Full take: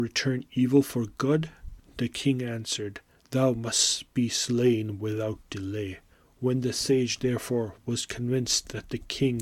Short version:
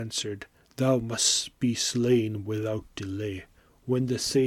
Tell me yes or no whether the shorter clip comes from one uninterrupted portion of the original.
yes